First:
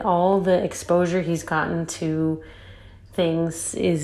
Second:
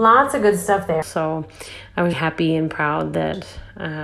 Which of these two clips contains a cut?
second; 2 cuts; at 1.0 s, 2.1 s

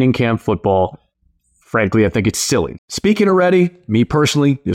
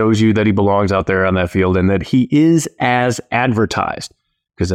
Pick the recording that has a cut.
first; 1 cut; at 2.8 s

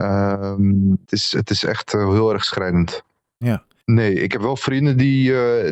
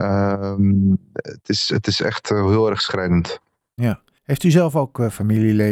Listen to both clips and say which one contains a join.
first; 2 cuts; at 1.1 s, 3.8 s

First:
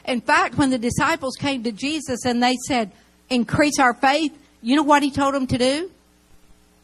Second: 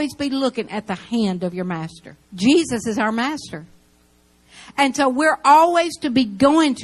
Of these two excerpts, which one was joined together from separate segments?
second; 1 cut; at 2.2 s

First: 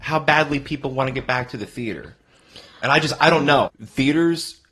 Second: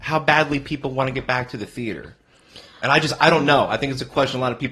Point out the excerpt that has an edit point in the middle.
first; 1 cut; at 3.7 s

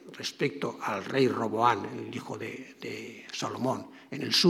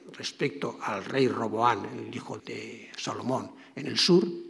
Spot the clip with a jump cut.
second; 1 cut; at 2.4 s

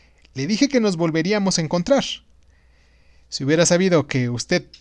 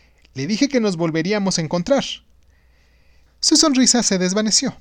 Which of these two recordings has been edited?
second; 1 cut; at 3.3 s

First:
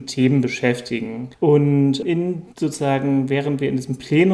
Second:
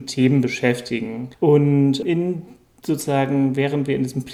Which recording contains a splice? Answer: first; 1 cut; at 2.5 s

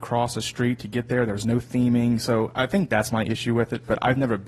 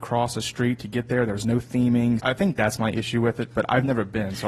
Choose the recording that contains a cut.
second; 1 cut; at 2.2 s

